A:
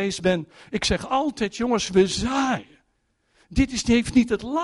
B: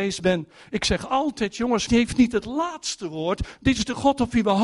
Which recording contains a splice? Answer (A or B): B